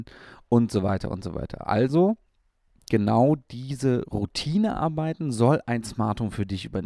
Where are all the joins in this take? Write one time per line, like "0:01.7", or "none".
none

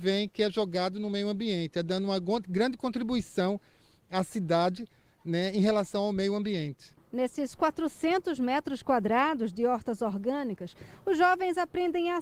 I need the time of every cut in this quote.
0:07.0

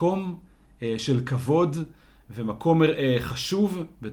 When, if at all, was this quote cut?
none

